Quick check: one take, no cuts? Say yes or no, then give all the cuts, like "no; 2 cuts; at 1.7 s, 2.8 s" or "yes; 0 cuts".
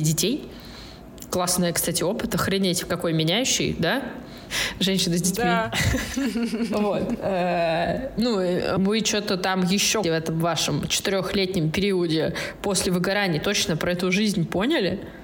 no; 2 cuts; at 8.8 s, 10.0 s